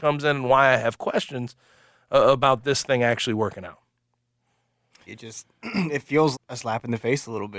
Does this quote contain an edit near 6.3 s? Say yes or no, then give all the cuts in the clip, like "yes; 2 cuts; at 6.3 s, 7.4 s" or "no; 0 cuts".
yes; 2 cuts; at 5.1 s, 6.3 s